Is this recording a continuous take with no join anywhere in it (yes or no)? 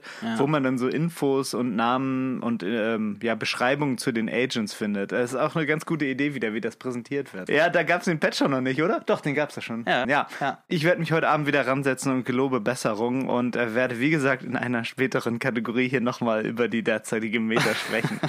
no